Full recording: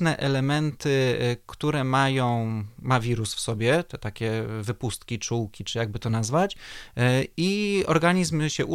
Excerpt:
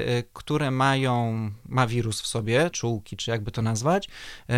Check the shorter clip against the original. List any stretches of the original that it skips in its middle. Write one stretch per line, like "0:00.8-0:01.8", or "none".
0:03.8-0:05.2